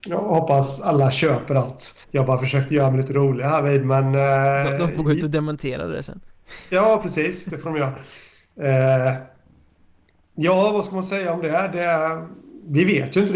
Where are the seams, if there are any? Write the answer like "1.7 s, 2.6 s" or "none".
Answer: 2.0 s